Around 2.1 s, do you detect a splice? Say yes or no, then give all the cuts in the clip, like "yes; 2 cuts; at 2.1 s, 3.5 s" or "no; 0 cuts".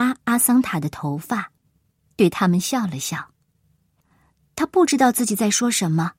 no; 1 cut; at 4.0 s